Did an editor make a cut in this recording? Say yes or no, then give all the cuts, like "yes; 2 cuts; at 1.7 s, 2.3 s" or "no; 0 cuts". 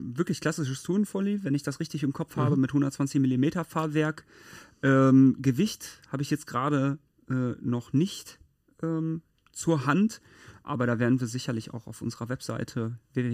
no; 0 cuts